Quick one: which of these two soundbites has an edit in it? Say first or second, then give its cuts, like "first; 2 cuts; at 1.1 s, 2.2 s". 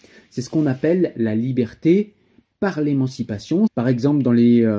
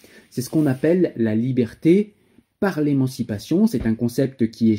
first; 1 cut; at 3.7 s